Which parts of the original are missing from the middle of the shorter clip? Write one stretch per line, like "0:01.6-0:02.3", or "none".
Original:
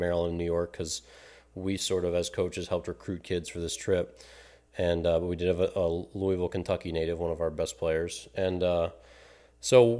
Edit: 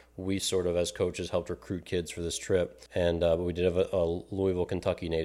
0:04.2-0:04.7